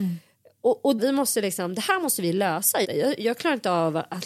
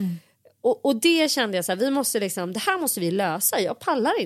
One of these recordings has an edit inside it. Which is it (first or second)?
first